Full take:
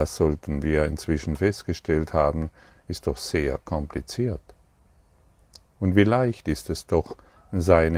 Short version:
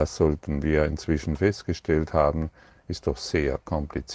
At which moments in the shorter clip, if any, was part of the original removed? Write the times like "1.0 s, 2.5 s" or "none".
none